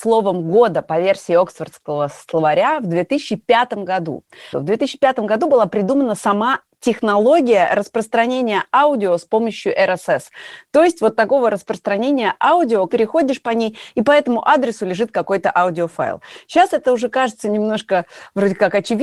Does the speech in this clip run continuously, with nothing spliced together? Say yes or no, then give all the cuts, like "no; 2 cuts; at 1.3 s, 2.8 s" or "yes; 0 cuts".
no; 2 cuts; at 4.5 s, 12.9 s